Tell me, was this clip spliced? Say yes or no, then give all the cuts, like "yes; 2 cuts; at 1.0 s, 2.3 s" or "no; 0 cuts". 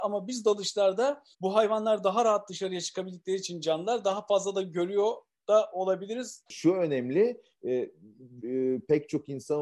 yes; 3 cuts; at 1.3 s, 6.5 s, 8.4 s